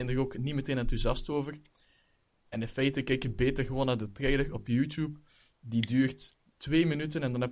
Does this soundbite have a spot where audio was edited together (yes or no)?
no